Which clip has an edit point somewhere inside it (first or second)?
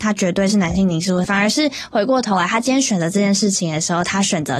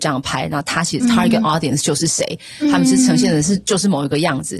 first